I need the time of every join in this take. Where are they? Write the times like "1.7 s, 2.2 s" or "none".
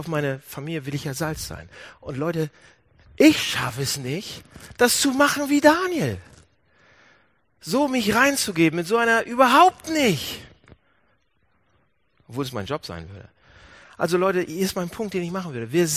none